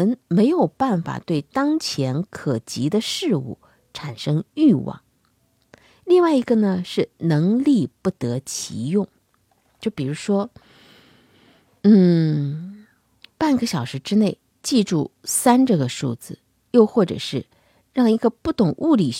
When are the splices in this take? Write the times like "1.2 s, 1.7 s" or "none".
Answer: 9.7 s